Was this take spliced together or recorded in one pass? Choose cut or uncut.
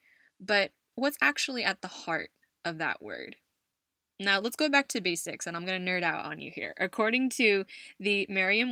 uncut